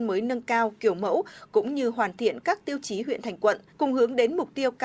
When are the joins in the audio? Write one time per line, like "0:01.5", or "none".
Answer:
0:03.7